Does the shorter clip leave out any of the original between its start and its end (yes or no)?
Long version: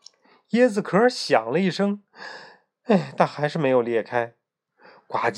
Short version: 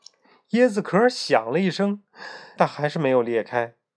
yes